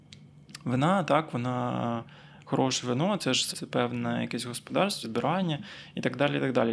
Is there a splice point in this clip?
yes; 2 cuts; at 3.5 s, 5.0 s

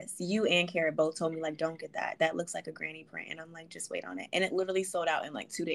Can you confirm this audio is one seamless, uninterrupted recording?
yes; 0 cuts

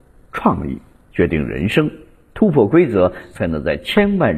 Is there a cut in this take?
no; 0 cuts

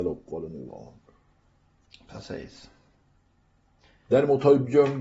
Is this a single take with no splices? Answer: yes; 0 cuts

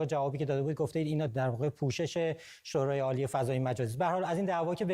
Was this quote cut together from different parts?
yes; 1 cut; at 1.3 s

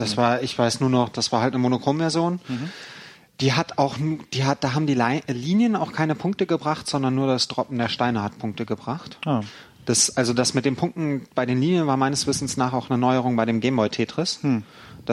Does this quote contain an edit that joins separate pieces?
no; 0 cuts

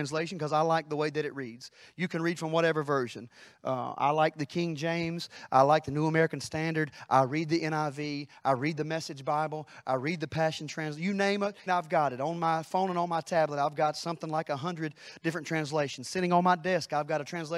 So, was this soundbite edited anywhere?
yes; 1 cut; at 11.7 s

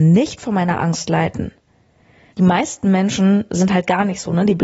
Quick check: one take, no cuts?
no; 1 cut; at 2.3 s

